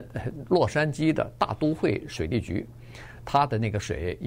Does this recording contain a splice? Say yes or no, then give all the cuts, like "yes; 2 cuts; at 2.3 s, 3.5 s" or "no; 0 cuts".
yes; 1 cut; at 3.2 s